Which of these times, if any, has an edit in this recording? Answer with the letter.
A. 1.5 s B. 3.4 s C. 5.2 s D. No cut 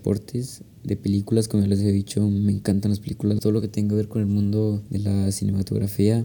B